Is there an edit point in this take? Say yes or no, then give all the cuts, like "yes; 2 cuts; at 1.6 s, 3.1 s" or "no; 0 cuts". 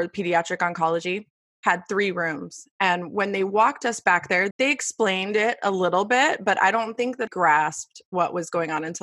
yes; 2 cuts; at 4.5 s, 7.3 s